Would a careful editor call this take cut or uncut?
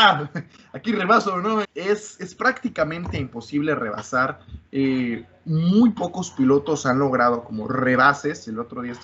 cut